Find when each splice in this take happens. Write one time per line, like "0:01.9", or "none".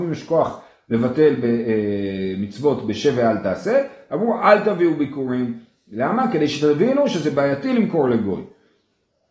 none